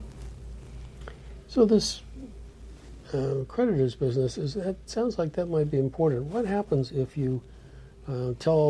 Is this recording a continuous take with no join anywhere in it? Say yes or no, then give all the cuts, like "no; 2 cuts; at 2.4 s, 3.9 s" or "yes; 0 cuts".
no; 1 cut; at 4.9 s